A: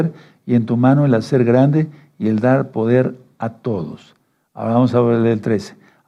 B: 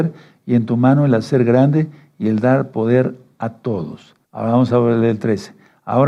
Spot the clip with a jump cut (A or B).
B